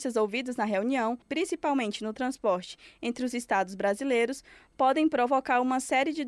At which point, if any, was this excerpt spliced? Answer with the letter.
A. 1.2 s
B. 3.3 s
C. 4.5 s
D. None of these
A